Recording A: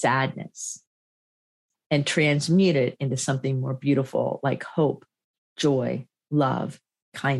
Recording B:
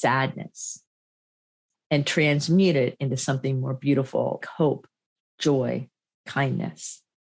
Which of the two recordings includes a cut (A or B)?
B